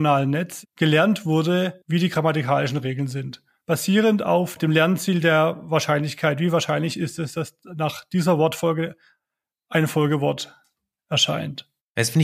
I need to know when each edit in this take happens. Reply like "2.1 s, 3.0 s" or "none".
none